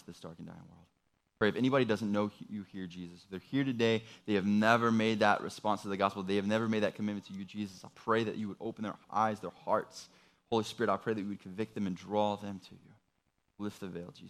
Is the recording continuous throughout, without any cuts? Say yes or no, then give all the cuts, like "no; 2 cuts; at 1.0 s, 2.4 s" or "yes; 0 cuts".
yes; 0 cuts